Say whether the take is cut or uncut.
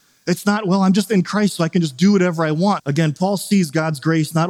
cut